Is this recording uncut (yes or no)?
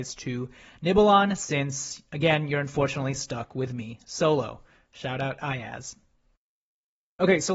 yes